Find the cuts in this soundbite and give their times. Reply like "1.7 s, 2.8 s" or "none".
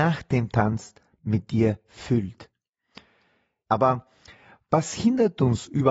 3.7 s